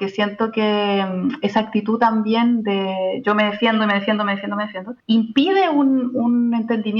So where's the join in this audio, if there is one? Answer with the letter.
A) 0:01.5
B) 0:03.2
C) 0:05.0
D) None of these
C